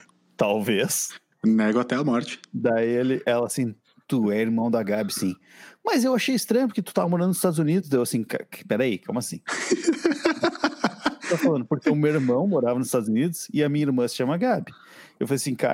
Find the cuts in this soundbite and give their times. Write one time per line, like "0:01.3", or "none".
none